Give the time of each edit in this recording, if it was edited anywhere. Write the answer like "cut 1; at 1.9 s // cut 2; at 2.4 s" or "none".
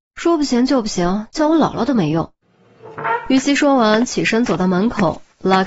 none

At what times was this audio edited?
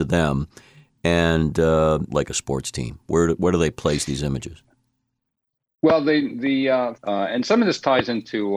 cut 1; at 2.1 s // cut 2; at 6.9 s

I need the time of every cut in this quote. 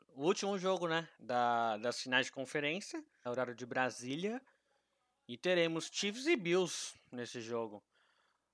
cut 1; at 3.3 s

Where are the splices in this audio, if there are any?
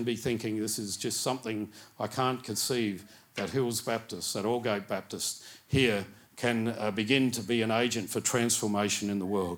none

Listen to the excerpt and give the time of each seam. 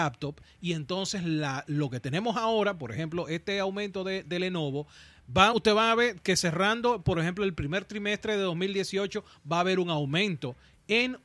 none

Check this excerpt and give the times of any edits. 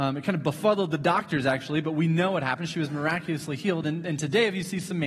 none

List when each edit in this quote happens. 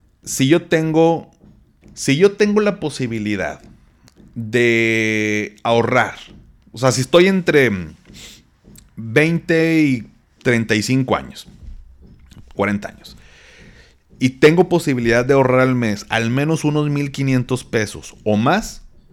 cut 1; at 1.8 s // cut 2; at 12.5 s

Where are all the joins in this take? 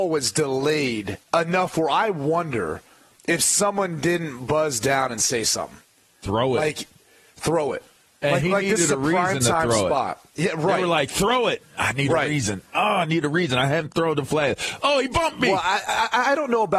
cut 1; at 1.2 s

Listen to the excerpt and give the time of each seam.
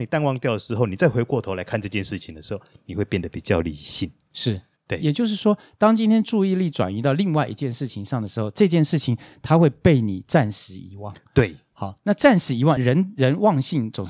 none

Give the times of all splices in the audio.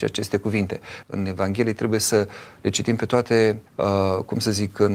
cut 1; at 1.0 s // cut 2; at 3.7 s

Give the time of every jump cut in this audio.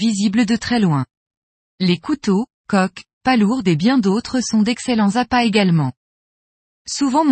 cut 1; at 1.7 s

